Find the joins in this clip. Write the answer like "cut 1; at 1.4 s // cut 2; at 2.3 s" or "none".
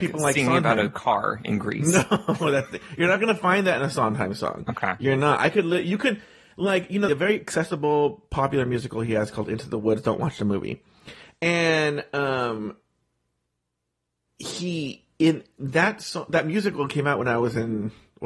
cut 1; at 7.1 s

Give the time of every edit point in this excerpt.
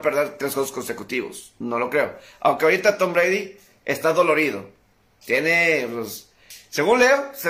none

